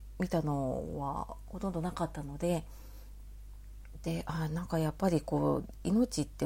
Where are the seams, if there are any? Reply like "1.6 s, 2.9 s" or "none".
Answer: none

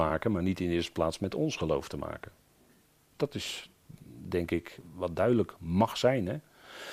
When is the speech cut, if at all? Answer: 3.1 s

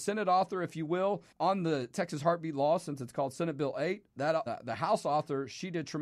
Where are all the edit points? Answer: 1.3 s, 4.5 s

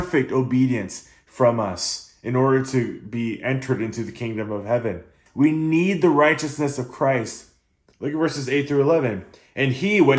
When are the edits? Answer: 5.3 s, 7.9 s

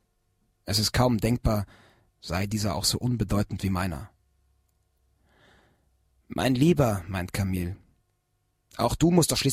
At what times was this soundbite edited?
2.1 s

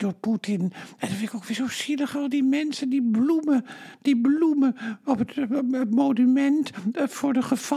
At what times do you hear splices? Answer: 5.0 s

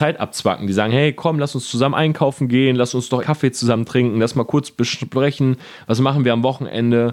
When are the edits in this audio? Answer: 3.2 s

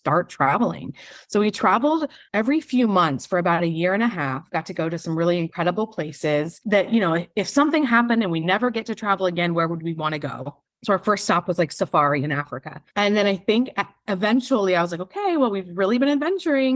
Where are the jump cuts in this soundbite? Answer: none

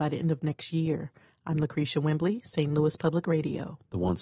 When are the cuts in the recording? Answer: none

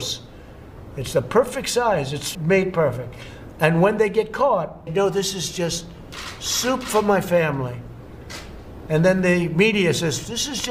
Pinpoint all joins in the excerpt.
2.3 s, 4.9 s

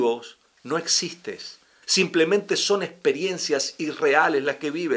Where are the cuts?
1.8 s

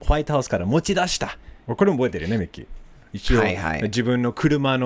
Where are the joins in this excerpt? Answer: 1.6 s, 3.1 s

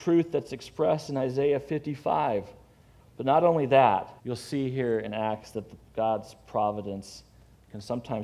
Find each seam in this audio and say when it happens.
3.0 s, 4.2 s

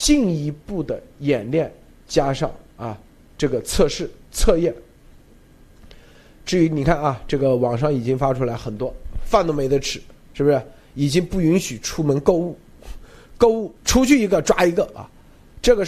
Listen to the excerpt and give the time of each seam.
10.2 s, 13.8 s

